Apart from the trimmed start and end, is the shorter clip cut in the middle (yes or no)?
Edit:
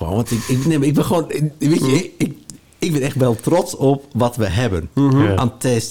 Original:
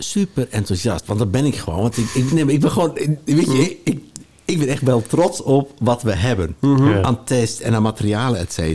no